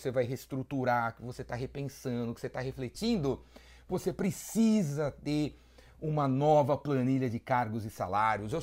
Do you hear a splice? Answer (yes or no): no